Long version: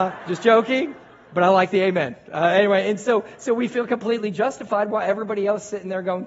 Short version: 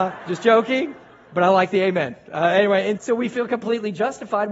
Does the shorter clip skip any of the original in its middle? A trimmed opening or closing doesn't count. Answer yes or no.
yes